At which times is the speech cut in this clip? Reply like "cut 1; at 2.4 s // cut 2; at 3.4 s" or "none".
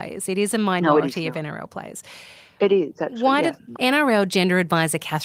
cut 1; at 3.7 s